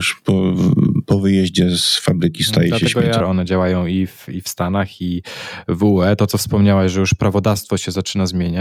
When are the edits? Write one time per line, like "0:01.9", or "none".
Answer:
0:03.2